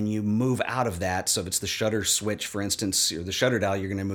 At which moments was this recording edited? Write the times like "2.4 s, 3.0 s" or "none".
none